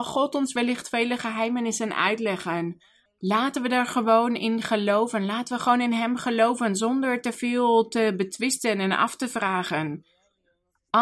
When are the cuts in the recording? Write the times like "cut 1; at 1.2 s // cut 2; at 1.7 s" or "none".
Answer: cut 1; at 3.1 s